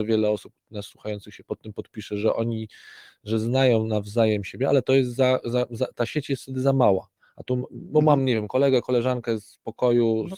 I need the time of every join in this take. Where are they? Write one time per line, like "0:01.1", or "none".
none